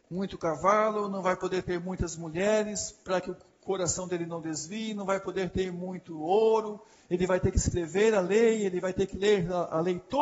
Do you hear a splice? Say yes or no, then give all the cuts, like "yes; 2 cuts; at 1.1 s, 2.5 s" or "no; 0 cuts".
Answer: no; 0 cuts